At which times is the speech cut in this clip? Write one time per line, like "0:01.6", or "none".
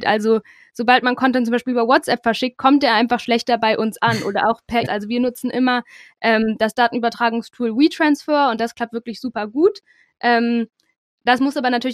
0:04.8